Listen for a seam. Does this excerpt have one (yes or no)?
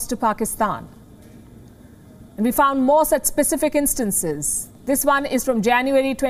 yes